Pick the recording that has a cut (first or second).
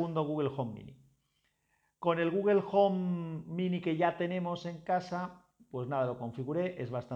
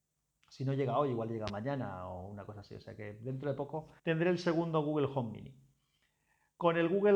second